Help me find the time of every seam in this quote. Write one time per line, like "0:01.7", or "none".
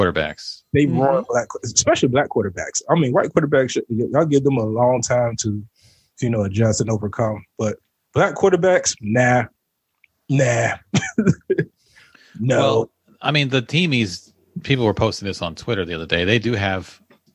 none